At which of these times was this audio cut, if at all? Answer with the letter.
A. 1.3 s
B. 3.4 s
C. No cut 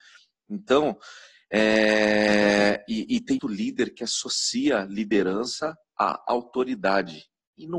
B